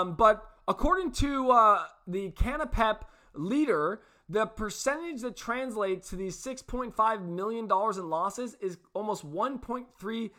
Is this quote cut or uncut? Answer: uncut